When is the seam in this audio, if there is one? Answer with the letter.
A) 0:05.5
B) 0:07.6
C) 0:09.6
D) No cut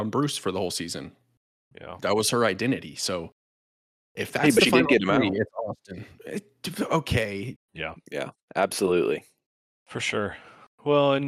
B